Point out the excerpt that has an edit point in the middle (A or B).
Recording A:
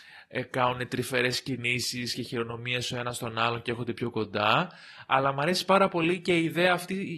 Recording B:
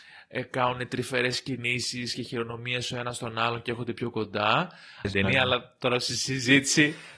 B